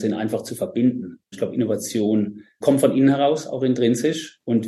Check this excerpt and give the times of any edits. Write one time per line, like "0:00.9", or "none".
0:01.3
0:02.6